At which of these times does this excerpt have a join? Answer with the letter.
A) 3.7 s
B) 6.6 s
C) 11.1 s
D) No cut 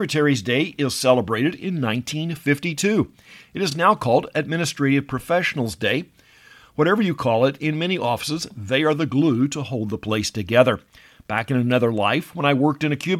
D